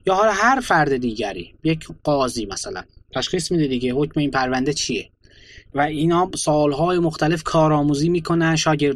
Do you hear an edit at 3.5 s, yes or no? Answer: no